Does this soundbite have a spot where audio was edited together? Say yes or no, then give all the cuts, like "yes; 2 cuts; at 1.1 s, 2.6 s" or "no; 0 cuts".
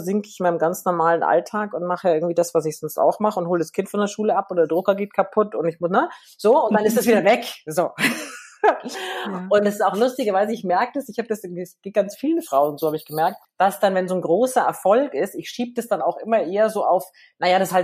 no; 0 cuts